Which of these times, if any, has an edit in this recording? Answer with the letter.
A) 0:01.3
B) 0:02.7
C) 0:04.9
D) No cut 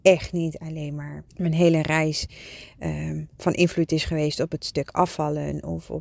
A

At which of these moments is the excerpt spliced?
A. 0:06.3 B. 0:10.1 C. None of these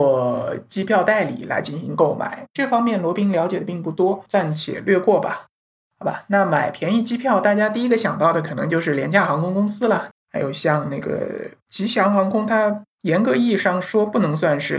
B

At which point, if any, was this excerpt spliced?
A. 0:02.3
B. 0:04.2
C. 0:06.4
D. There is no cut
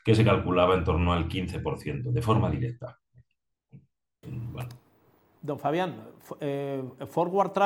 B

